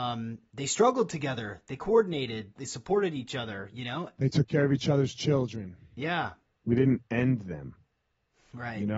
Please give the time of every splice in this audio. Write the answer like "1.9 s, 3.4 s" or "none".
2.6 s, 6.5 s